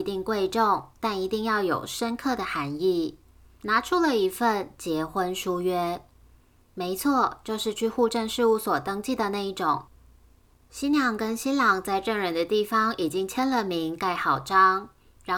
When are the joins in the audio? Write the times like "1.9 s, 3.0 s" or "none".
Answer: 3.6 s